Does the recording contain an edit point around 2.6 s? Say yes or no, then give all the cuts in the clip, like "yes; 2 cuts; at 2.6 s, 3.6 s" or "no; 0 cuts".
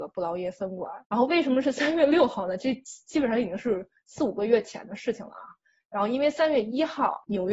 no; 1 cut; at 1.0 s